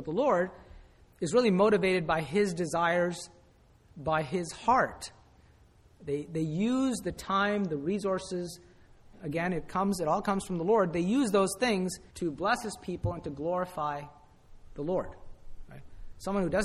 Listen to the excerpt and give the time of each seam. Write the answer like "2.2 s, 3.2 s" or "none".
9.1 s, 12.1 s